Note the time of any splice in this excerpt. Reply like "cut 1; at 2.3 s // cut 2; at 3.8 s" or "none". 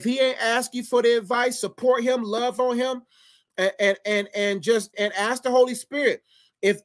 cut 1; at 4.9 s